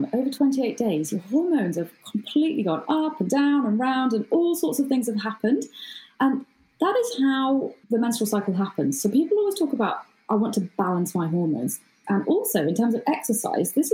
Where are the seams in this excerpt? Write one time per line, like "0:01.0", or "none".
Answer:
0:07.8
0:12.0